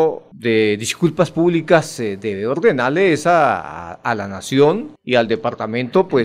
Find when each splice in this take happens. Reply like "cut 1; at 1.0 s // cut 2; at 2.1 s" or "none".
none